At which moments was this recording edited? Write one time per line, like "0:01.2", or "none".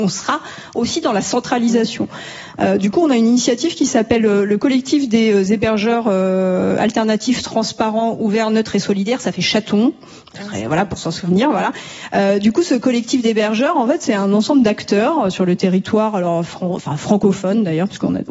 none